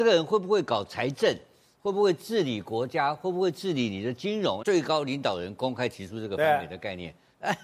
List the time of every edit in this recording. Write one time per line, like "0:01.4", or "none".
0:04.6